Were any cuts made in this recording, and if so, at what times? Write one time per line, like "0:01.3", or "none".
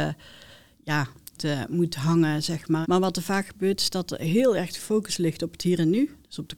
0:01.4
0:02.8